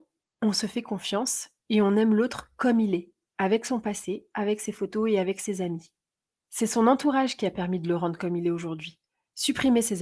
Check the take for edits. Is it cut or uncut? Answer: uncut